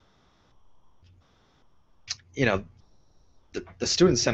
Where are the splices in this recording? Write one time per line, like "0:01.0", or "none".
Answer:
0:02.2